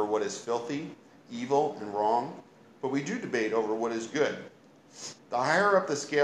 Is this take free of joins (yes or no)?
no